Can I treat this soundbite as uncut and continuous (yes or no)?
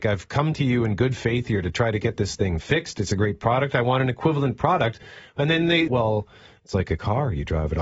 no